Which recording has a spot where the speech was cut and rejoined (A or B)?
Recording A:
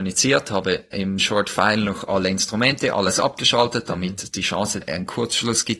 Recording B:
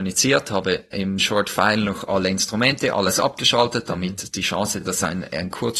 A